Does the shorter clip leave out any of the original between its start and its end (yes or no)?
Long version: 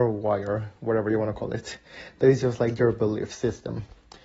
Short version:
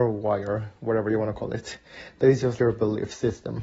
yes